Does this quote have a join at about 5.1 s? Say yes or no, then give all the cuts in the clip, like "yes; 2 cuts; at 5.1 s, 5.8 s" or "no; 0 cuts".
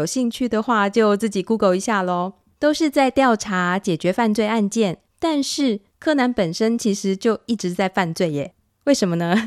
yes; 2 cuts; at 2.5 s, 5.1 s